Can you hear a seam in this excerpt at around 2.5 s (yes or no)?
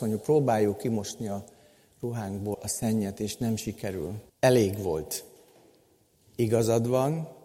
yes